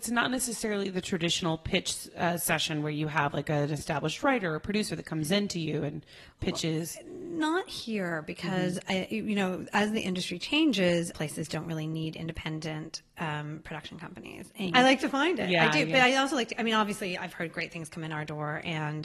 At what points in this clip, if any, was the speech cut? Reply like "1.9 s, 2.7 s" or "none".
11.1 s, 14.7 s